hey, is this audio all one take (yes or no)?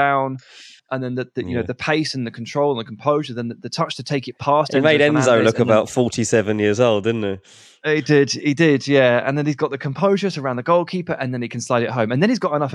yes